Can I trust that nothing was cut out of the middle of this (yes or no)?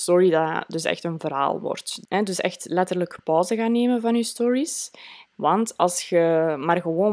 no